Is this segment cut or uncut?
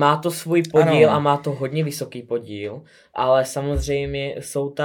uncut